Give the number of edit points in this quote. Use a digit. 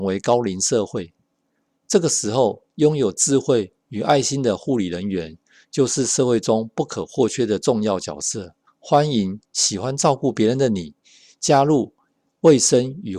1